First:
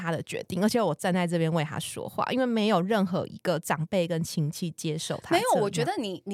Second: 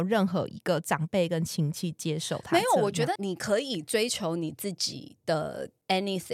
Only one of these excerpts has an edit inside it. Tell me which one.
second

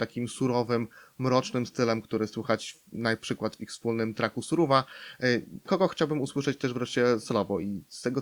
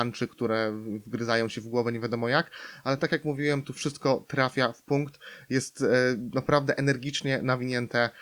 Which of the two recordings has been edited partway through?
first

